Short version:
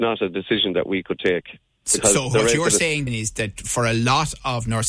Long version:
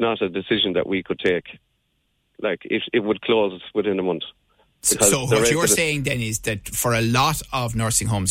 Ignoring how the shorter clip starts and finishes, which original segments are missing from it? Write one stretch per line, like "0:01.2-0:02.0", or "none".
0:01.8-0:04.8
0:06.0-0:06.1

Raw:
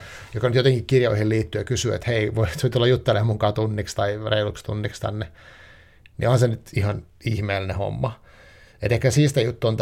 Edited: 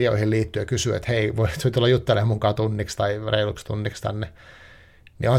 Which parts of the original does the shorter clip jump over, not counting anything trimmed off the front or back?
none

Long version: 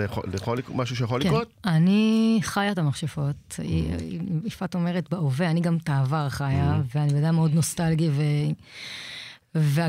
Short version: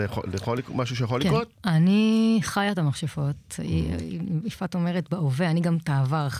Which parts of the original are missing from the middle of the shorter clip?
none

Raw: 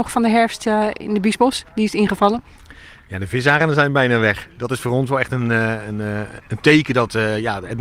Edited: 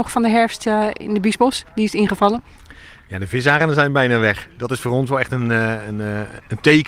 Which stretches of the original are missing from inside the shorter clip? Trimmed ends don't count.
none

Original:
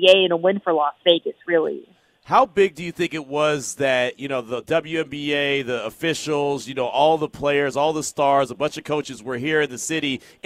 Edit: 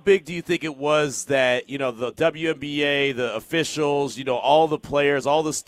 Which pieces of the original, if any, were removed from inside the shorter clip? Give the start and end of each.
none

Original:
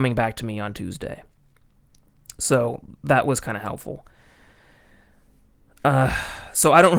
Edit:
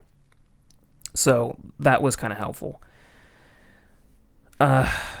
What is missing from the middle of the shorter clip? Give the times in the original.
none

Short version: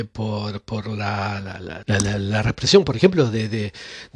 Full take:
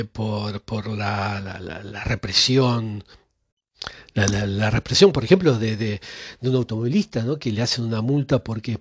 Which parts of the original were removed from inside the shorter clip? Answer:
0:01.8-0:04.1

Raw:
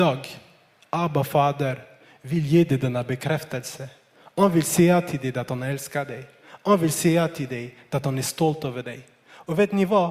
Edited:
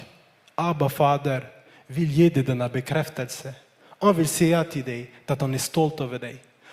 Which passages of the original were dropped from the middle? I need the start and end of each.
0:04.3-0:06.6

